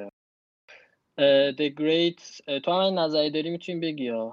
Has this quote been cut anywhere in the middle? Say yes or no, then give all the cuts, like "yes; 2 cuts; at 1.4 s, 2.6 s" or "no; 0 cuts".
no; 0 cuts